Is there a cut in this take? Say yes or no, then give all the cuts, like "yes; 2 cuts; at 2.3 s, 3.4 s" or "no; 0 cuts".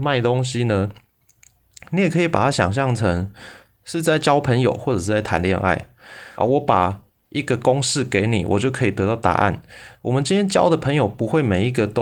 yes; 2 cuts; at 6.4 s, 10.0 s